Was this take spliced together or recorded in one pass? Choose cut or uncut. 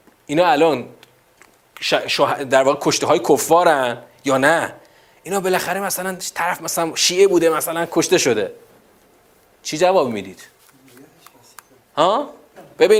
uncut